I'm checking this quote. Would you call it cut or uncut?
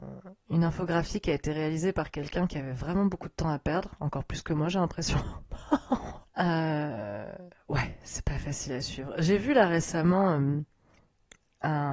cut